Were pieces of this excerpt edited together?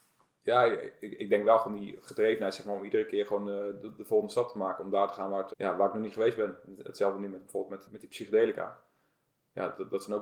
yes; 1 cut; at 5.5 s

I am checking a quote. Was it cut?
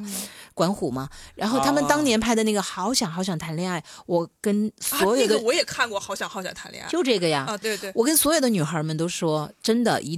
yes; 1 cut; at 7.6 s

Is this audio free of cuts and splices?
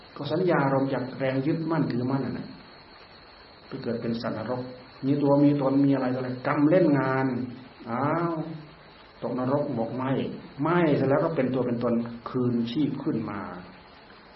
yes; 0 cuts

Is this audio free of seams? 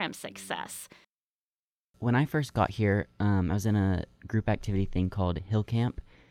yes; 0 cuts

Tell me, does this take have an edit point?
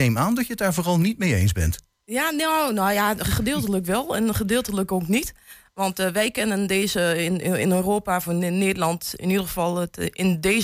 no; 0 cuts

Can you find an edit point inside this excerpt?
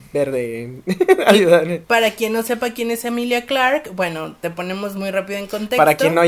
no; 0 cuts

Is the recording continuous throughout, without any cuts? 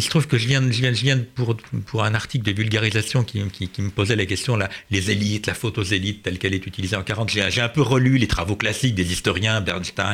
yes; 0 cuts

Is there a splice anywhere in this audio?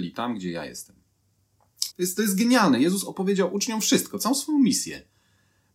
yes; 1 cut; at 1.9 s

